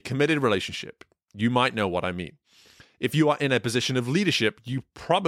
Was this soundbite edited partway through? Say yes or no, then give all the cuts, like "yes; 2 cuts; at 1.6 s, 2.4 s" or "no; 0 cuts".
no; 0 cuts